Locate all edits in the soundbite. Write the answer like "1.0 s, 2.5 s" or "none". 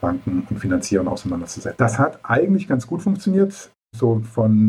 1.8 s